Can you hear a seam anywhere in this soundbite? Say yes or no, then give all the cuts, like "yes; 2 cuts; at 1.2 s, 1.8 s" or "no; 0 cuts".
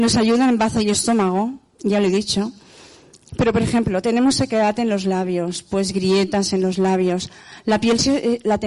no; 0 cuts